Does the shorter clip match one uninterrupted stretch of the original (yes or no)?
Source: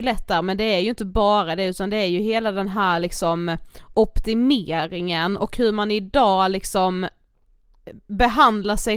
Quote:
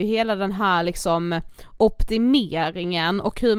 yes